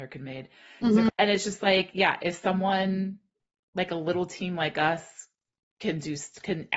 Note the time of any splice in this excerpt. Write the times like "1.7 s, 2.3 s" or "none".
1.1 s